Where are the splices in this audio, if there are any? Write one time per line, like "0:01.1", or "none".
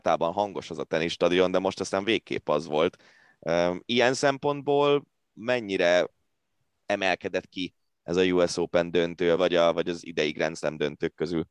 0:09.4